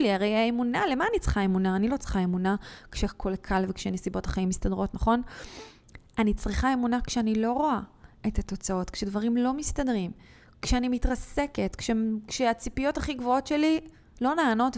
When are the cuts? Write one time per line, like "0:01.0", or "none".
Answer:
none